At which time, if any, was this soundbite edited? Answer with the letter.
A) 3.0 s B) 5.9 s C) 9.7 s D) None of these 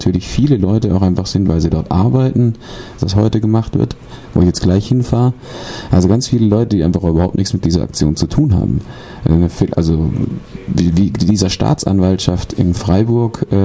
A